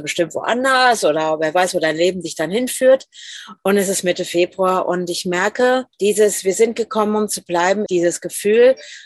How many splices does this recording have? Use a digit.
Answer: 3